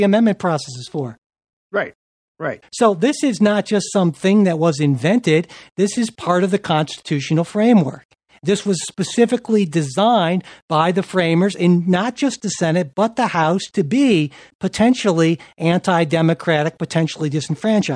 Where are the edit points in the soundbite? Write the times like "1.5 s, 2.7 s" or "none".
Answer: 2.6 s

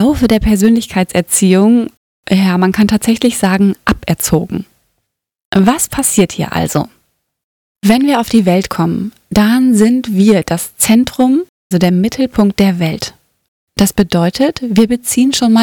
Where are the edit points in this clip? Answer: 11.7 s

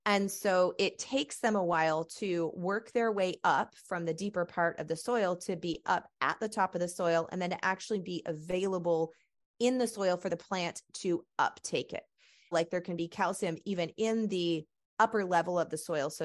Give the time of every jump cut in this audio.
12.5 s

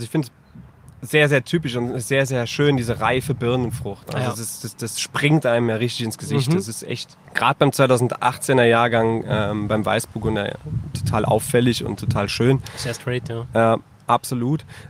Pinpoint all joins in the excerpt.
7.3 s

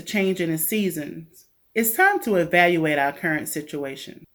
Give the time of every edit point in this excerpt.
1.7 s

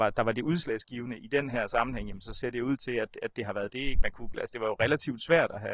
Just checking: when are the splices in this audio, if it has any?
2.8 s, 4.3 s

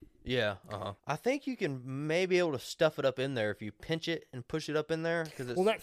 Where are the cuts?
1.0 s

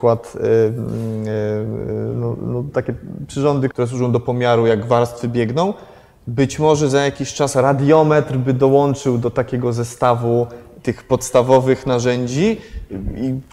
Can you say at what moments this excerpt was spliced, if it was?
3.7 s

